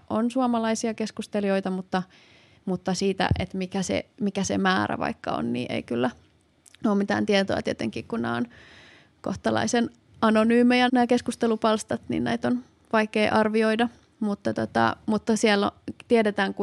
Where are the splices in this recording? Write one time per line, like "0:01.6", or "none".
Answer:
0:10.9